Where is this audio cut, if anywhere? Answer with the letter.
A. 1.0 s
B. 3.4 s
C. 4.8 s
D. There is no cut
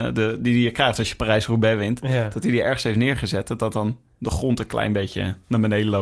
D